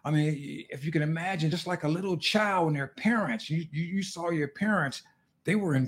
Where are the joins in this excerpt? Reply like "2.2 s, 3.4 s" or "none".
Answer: none